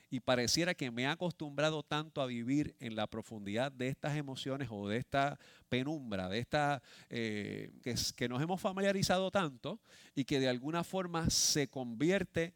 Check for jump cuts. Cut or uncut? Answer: cut